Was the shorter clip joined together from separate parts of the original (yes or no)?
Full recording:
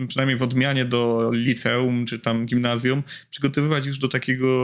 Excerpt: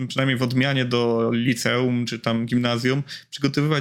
no